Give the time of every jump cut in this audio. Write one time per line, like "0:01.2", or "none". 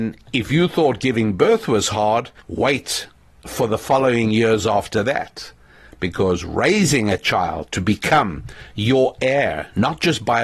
0:02.4